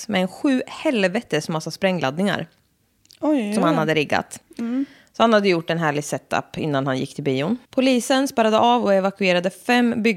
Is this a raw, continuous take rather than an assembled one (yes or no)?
no